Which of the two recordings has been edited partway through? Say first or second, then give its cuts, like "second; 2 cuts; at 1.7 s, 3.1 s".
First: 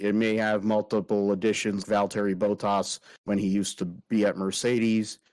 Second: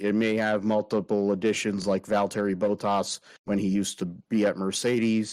first; 1 cut; at 1.8 s